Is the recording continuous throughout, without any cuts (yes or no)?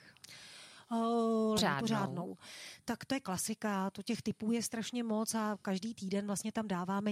no